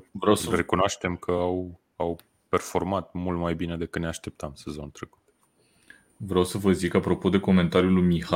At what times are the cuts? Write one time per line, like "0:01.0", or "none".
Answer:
none